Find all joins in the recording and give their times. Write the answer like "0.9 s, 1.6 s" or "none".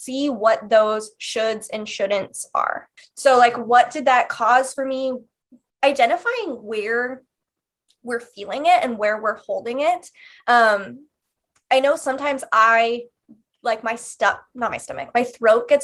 3.0 s

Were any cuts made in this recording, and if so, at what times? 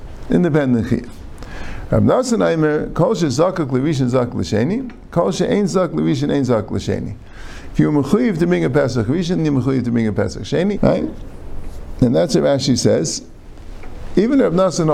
9.4 s, 10.8 s

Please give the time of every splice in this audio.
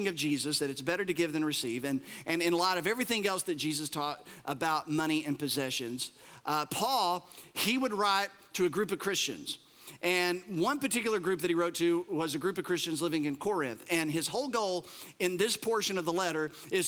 none

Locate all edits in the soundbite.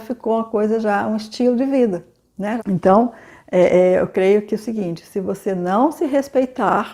2.6 s

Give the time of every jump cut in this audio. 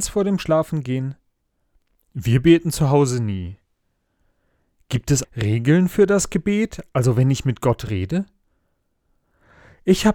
5.2 s

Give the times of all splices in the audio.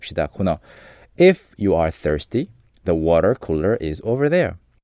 none

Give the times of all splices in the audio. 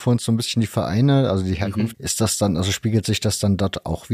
1.9 s

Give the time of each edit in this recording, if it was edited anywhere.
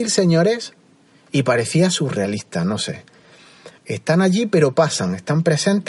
3.8 s

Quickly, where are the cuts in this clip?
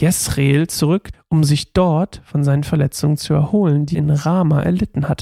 1.1 s, 3.9 s

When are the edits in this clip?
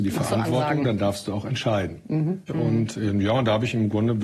2.5 s

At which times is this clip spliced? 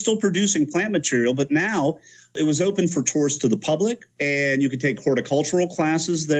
4.1 s

